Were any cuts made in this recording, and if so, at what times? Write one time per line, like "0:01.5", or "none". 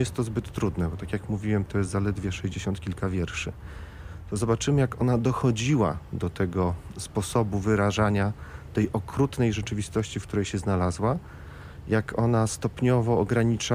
none